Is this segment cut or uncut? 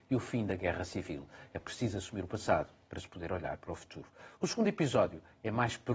uncut